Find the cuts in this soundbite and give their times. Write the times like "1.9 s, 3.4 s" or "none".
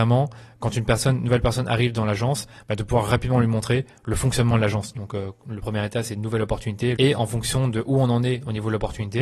4.9 s, 7.0 s